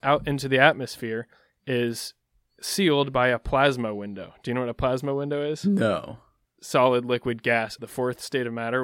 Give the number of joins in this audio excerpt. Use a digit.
2